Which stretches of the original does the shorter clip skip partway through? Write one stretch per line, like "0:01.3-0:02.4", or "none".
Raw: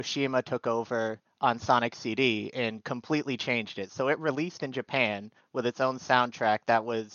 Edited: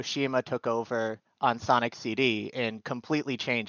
none